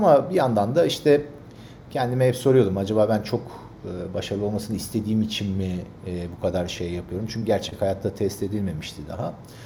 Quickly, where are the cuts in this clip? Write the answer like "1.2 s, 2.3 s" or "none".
none